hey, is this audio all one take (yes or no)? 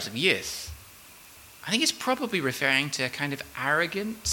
yes